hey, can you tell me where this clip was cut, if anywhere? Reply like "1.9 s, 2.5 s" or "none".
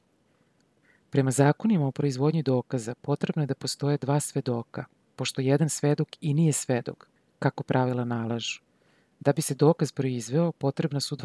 none